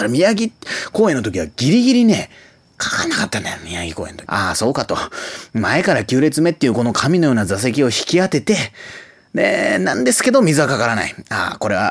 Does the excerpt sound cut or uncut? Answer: cut